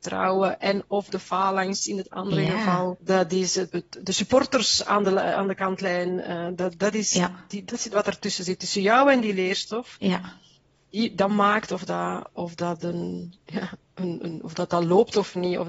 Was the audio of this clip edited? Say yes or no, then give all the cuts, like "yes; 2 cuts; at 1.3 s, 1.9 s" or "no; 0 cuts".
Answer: no; 0 cuts